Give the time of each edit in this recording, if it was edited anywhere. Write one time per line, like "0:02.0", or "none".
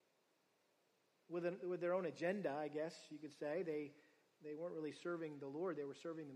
none